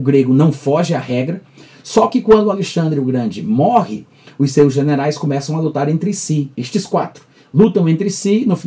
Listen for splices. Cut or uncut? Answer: cut